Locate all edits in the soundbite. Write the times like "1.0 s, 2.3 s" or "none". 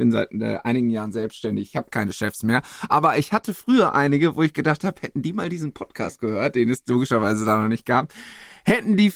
none